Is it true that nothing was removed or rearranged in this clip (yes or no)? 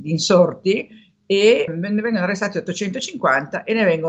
no